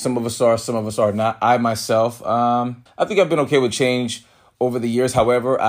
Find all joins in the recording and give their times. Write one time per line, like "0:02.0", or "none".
0:02.9